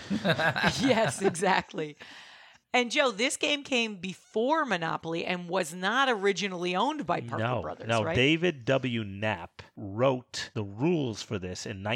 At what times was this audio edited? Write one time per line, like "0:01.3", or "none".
none